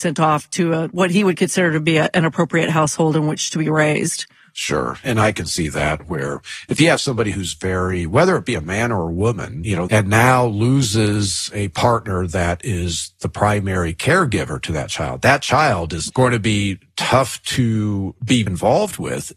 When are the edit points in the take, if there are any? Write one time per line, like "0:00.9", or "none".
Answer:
0:09.9
0:16.1
0:18.5